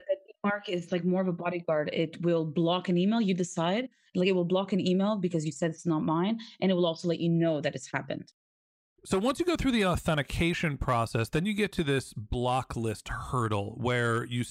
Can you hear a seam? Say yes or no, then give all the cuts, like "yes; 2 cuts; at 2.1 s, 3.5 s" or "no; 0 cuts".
no; 0 cuts